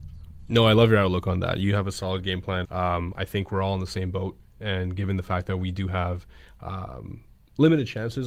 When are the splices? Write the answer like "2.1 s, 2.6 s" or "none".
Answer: 2.6 s